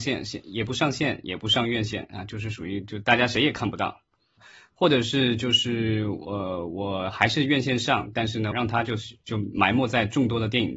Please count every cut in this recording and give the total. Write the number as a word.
two